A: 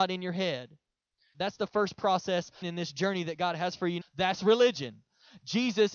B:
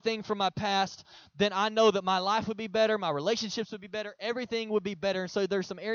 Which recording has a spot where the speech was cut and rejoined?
A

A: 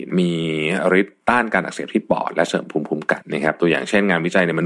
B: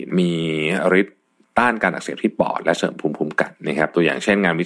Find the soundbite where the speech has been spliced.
A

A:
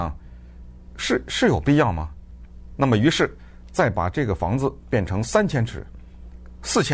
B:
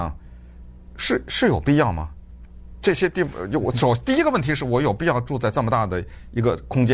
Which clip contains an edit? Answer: A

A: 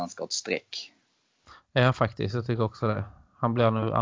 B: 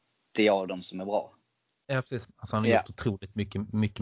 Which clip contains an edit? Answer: B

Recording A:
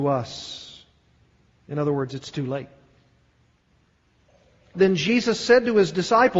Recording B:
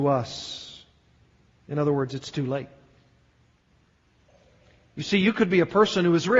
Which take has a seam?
A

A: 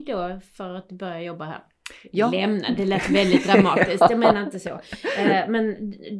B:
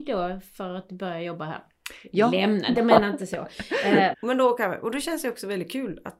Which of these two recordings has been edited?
B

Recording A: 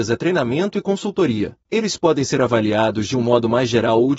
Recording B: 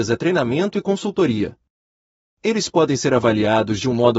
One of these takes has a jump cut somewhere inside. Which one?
A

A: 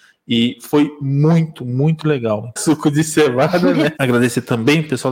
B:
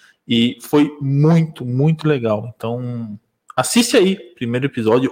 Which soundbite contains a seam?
A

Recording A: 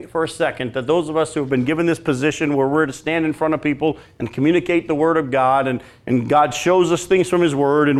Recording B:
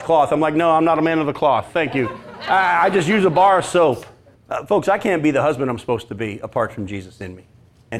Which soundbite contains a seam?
B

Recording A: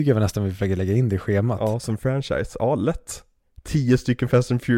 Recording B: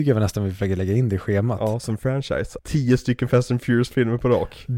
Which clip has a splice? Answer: B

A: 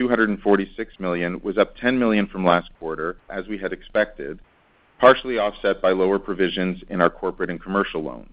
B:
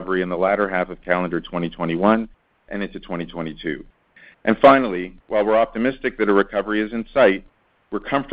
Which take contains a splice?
A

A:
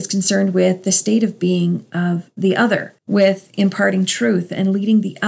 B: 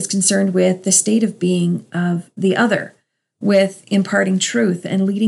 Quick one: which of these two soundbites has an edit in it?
A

